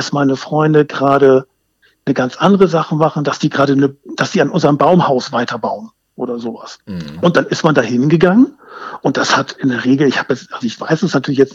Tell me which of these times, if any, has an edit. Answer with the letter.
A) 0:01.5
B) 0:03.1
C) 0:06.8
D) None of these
C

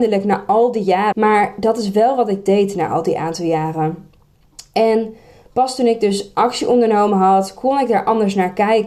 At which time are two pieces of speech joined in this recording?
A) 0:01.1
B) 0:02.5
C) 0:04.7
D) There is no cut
A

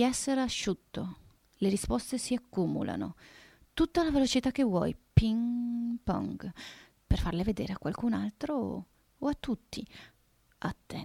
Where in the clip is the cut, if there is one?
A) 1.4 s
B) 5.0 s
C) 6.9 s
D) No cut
C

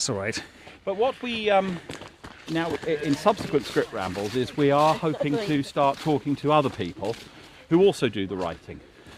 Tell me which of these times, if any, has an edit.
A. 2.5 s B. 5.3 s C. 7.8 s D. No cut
A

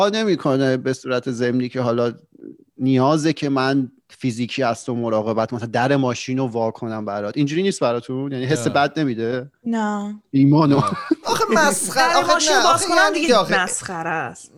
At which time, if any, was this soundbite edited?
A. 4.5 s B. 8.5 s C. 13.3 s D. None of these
C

